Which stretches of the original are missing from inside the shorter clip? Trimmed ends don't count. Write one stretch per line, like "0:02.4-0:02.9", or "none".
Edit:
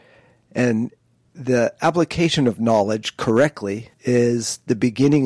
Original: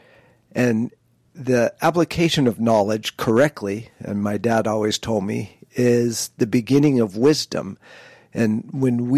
0:03.9-0:05.6